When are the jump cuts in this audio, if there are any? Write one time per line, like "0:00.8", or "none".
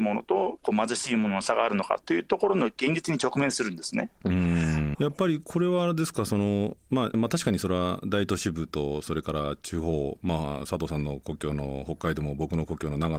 0:04.9
0:07.1